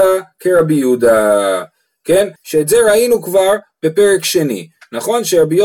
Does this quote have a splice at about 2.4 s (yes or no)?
yes